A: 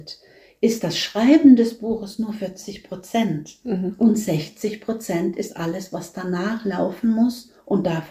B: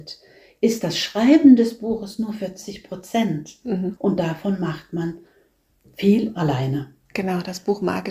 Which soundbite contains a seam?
B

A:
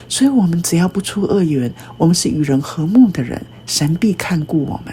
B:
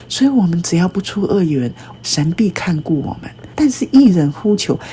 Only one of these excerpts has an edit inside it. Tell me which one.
B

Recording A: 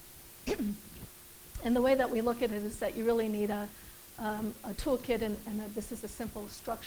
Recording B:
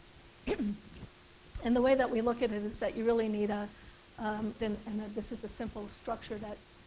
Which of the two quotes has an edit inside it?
B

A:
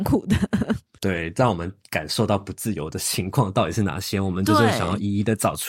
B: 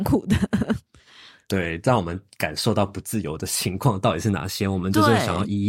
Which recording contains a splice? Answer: A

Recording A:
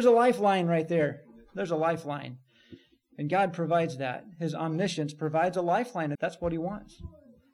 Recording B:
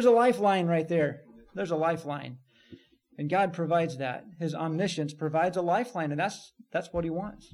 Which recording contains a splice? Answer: A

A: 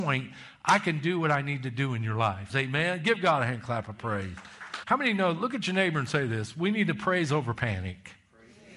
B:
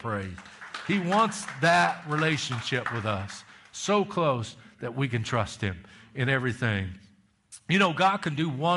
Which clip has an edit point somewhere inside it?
A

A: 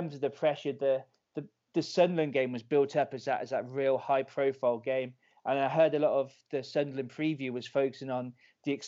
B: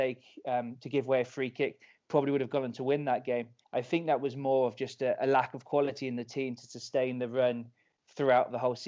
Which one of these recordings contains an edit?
B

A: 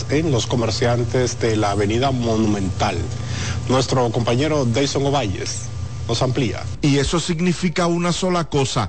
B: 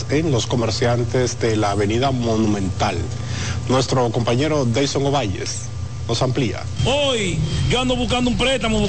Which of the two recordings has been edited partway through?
A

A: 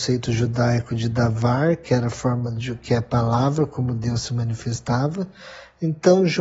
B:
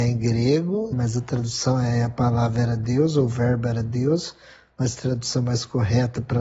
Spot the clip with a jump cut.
B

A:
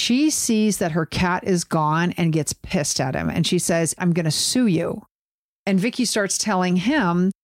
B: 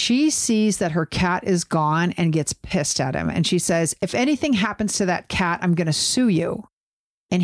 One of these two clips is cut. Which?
A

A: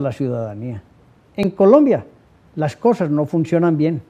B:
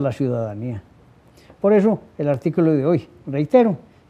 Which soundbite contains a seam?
A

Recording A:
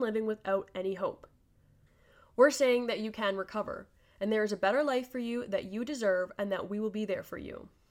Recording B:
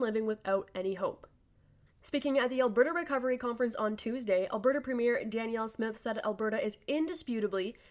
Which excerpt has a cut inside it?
B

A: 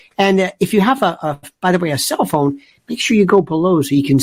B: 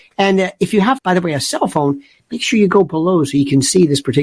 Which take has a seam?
B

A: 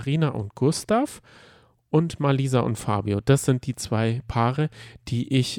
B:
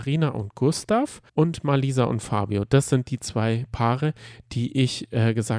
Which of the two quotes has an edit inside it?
B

